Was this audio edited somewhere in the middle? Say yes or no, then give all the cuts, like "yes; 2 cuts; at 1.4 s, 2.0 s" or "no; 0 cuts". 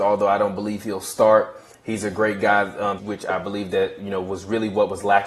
yes; 1 cut; at 3.0 s